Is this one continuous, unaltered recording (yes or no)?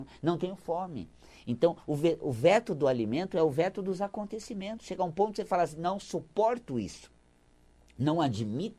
yes